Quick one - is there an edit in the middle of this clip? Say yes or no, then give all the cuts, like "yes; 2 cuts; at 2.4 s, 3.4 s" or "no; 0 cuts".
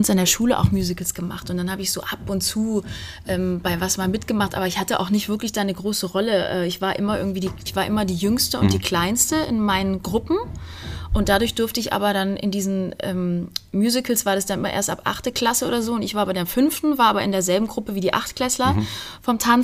yes; 1 cut; at 7.7 s